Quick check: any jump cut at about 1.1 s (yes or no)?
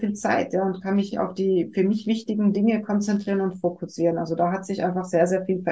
yes